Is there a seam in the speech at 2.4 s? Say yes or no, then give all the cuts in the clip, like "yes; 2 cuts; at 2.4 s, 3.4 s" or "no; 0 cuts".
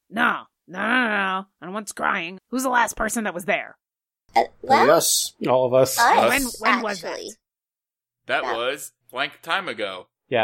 yes; 2 cuts; at 2.4 s, 9.0 s